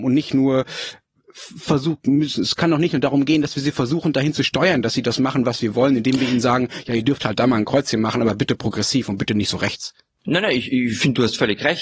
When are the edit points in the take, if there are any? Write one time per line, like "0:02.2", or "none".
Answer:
none